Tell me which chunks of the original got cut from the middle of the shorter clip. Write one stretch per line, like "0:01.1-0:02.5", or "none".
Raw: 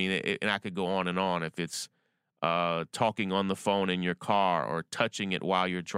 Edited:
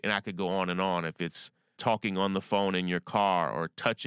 0:02.1-0:02.9